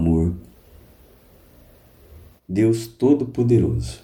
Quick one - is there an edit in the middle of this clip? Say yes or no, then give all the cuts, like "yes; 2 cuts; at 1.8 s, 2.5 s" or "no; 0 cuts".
no; 0 cuts